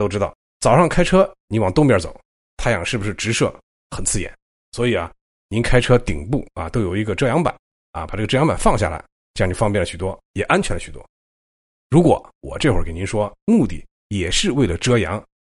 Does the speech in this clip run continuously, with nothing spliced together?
no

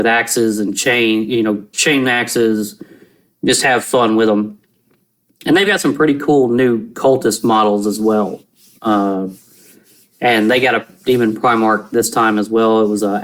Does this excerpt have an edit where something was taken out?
yes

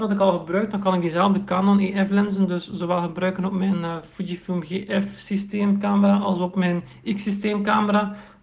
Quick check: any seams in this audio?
no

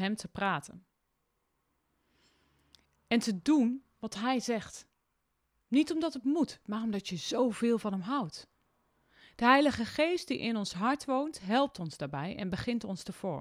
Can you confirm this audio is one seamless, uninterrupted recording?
yes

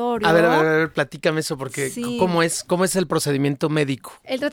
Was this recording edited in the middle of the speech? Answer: no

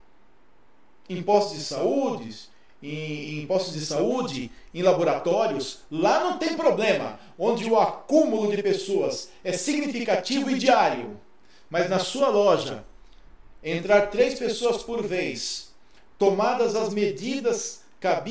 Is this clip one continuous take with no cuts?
yes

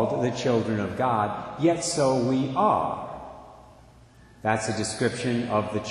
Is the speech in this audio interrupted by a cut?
no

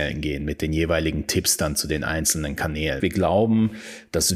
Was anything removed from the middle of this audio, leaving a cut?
yes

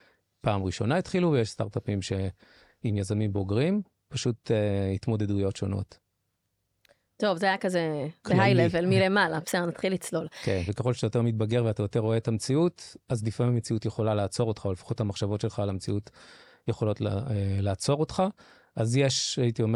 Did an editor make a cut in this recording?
yes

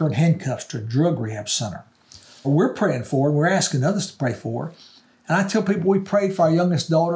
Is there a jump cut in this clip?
yes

